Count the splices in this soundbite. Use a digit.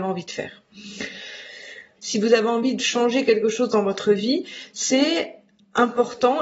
1